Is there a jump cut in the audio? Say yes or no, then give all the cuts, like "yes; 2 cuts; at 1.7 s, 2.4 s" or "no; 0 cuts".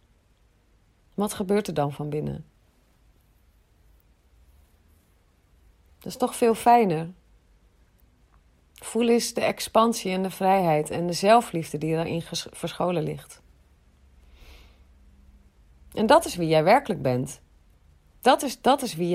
no; 0 cuts